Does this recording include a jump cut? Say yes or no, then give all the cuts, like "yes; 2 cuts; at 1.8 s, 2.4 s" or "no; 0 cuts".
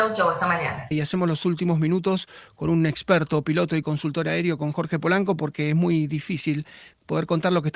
yes; 1 cut; at 0.9 s